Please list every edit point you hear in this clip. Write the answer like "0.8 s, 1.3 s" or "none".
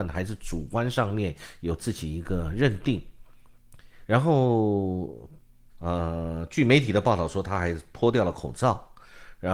4.1 s, 5.7 s